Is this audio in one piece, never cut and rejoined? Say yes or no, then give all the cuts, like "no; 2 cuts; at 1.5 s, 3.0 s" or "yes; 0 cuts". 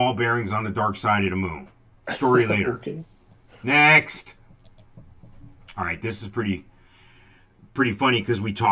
yes; 0 cuts